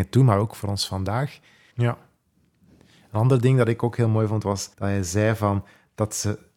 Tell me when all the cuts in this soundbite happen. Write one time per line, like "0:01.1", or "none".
0:01.7
0:04.7